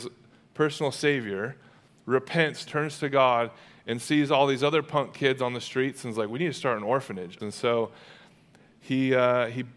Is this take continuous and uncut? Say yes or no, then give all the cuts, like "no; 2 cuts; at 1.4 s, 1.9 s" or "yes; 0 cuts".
no; 2 cuts; at 2.7 s, 7.4 s